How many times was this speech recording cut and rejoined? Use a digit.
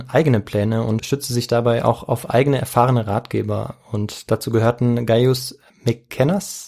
0